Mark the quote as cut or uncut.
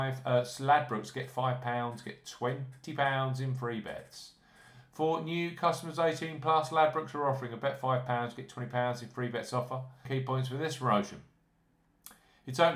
cut